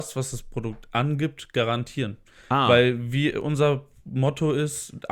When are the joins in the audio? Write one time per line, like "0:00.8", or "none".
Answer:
none